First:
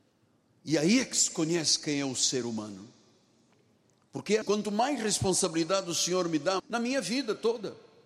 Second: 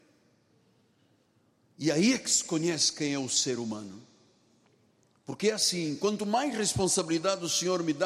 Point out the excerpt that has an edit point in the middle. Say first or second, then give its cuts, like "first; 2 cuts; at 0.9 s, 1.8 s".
first; 2 cuts; at 4.4 s, 6.6 s